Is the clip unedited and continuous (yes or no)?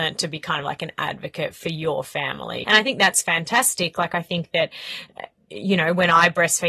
no